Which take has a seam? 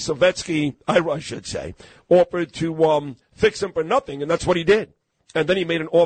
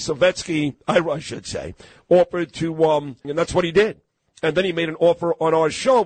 second; 1 cut; at 3.2 s

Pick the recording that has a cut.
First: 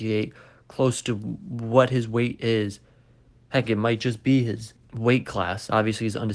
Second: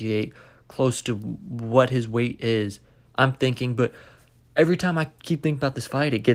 second; 1 cut; at 3.1 s

